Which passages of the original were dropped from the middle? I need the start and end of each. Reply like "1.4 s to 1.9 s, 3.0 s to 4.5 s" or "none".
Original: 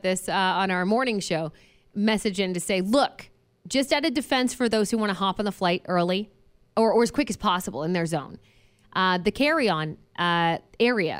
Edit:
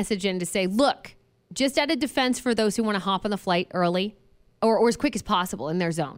none